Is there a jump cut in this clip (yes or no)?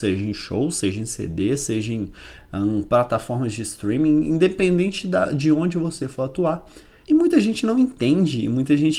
yes